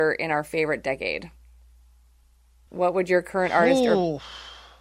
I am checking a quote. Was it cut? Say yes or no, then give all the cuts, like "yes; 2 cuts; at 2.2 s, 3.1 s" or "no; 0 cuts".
yes; 1 cut; at 2.7 s